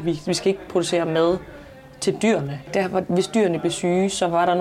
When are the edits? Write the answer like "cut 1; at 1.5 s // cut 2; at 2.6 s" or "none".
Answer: cut 1; at 2.7 s